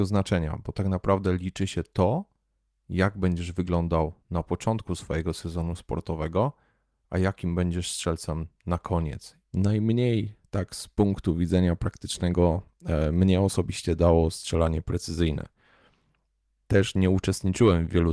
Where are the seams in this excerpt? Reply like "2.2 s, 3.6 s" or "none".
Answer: 9.4 s